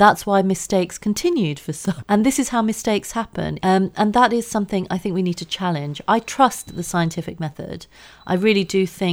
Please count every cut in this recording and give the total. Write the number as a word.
two